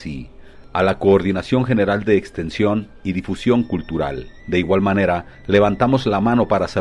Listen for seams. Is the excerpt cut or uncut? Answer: cut